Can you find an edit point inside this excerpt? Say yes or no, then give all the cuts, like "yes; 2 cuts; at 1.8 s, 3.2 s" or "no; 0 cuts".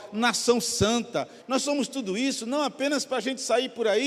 yes; 1 cut; at 1.4 s